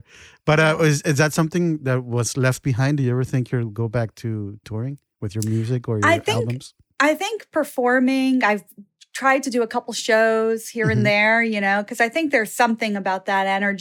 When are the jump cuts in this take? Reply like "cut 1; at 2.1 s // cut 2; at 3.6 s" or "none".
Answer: none